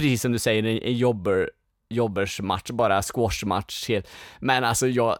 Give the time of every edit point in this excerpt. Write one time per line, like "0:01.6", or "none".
none